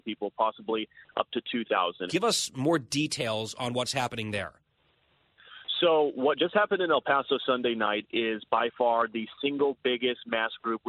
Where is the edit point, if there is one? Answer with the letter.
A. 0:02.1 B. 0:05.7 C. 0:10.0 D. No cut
A